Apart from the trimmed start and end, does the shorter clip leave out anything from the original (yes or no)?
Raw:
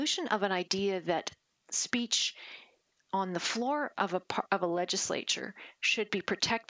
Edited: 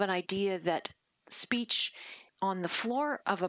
yes